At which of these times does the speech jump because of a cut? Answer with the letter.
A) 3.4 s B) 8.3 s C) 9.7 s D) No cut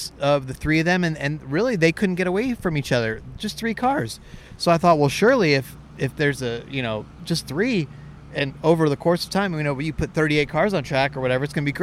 D